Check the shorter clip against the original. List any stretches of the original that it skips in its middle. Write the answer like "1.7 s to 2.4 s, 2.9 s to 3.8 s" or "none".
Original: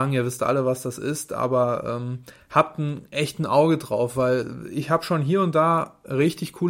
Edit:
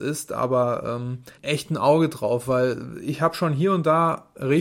2.4 s to 3.1 s

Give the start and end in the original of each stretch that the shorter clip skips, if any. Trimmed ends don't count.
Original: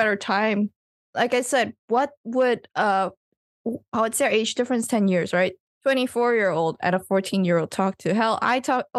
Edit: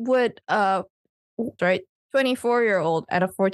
3.9 s to 5.3 s

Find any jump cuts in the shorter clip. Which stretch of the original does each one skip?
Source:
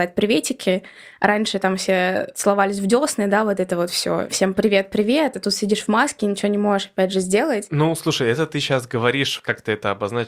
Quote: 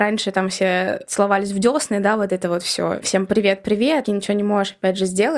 5.3 s to 6.2 s

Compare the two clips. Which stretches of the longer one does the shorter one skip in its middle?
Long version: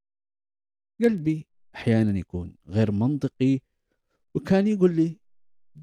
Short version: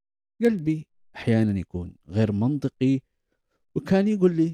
none

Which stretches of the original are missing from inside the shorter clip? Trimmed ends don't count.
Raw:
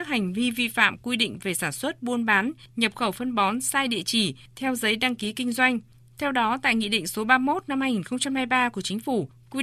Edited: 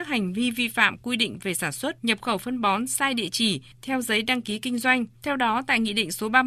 2.0 s to 2.7 s, 5.9 s to 6.1 s

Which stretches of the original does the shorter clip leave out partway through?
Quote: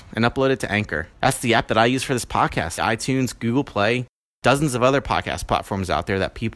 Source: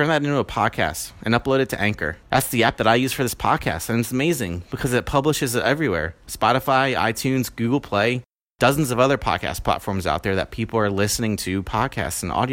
3.9 s to 6.9 s

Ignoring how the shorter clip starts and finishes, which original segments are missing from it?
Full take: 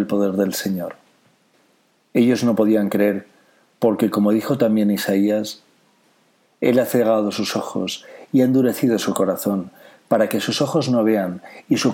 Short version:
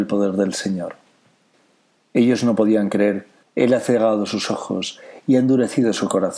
3.4 s to 6.5 s

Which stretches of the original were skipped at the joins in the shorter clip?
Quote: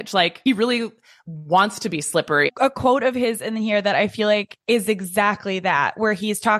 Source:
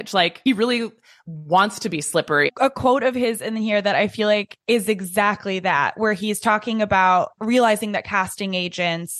none

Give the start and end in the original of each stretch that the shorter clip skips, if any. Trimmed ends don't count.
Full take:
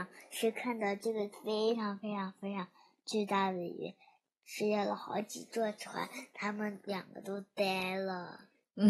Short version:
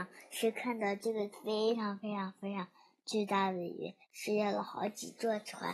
4.0 s to 4.4 s

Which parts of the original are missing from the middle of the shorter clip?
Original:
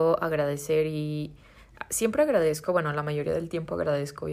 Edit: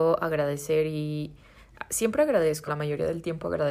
2.7 s to 2.9 s

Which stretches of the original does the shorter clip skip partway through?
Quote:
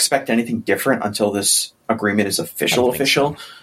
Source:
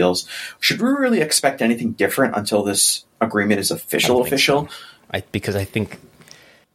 none

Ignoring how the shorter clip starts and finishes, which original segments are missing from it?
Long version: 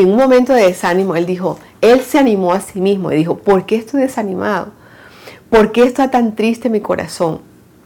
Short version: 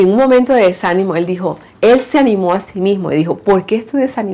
none

